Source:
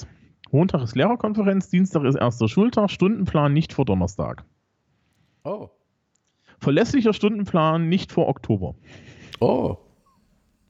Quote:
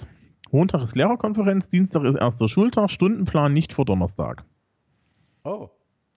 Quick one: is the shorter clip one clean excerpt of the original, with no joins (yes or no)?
yes